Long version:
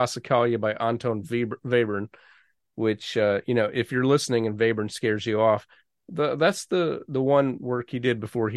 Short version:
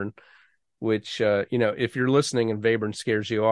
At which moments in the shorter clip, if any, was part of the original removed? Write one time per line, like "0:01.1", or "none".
none